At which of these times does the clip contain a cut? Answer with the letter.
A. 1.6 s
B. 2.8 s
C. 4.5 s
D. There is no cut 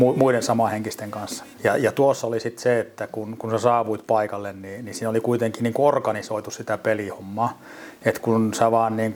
A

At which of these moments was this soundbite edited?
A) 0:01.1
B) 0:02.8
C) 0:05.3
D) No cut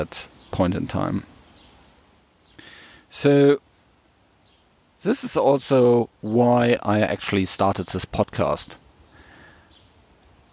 D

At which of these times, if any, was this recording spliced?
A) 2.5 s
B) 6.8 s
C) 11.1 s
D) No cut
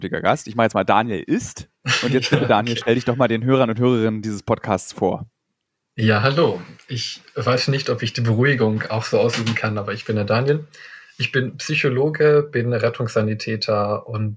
D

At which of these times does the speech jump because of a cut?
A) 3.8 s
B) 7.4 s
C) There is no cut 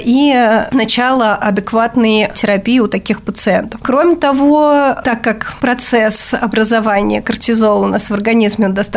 C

